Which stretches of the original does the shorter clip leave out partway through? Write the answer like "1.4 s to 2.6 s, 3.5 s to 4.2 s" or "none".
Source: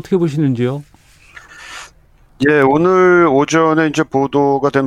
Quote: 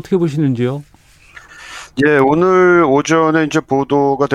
1.9 s to 2.4 s